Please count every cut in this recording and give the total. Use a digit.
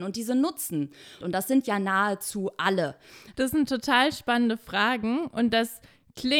2